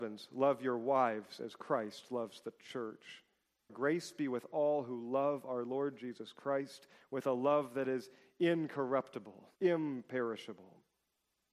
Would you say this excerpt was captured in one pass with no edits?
no; 2 cuts; at 3.7 s, 9.6 s

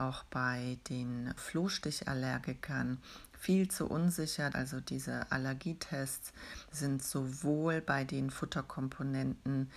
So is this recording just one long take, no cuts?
no; 3 cuts; at 1.4 s, 4.5 s, 6.7 s

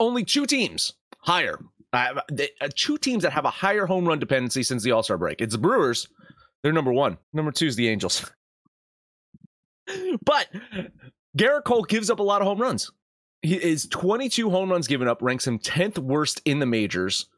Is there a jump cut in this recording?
yes; 1 cut; at 7.2 s

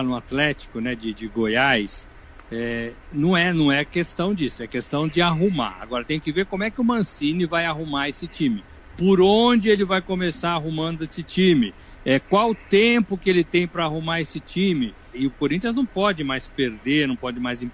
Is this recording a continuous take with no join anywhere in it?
no; 1 cut; at 15.1 s

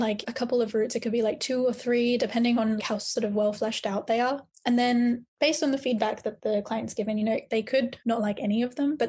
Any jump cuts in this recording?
no; 0 cuts

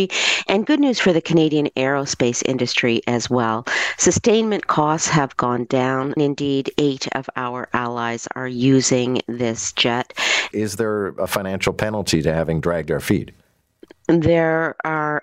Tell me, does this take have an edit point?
yes; 2 cuts; at 6.2 s, 10.5 s

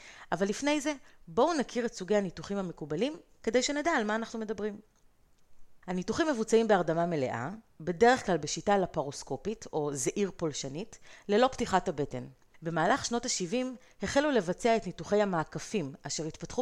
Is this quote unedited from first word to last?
no; 2 cuts; at 5.8 s, 12.5 s

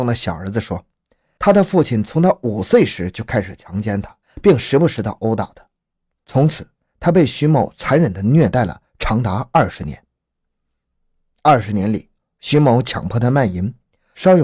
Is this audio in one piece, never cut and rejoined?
no; 1 cut; at 6.2 s

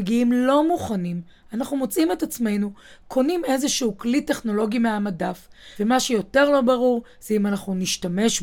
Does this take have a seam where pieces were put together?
yes; 1 cut; at 5.8 s

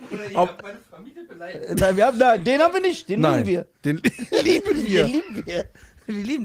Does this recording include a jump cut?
no; 0 cuts

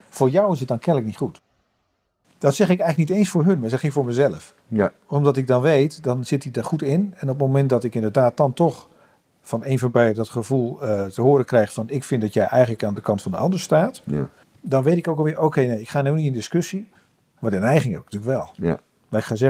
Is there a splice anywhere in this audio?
no; 0 cuts

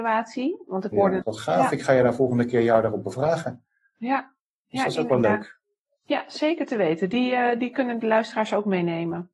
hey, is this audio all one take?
no; 1 cut; at 1.2 s

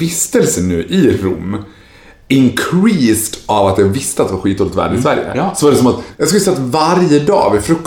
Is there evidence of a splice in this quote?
yes; 1 cut; at 6.1 s

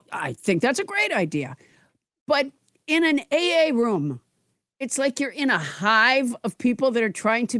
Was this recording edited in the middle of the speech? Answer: no; 0 cuts

